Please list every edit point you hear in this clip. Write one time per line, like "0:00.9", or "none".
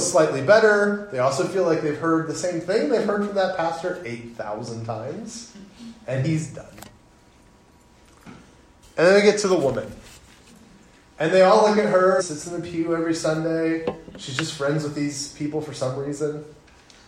0:12.2